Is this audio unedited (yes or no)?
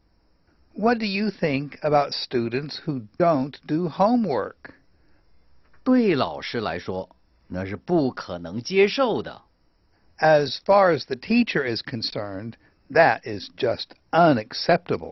yes